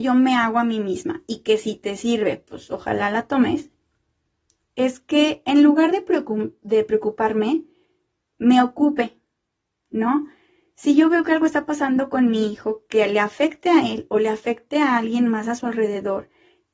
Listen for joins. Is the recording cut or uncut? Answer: uncut